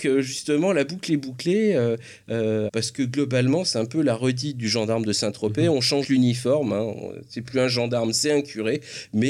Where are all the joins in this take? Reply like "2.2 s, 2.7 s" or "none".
2.7 s, 6.0 s